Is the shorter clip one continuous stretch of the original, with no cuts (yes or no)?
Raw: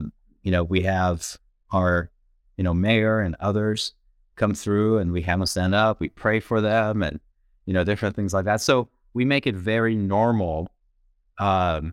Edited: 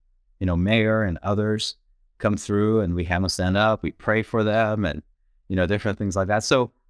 yes